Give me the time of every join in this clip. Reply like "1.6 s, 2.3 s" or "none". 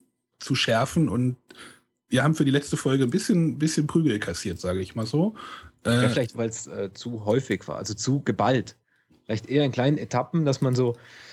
6.3 s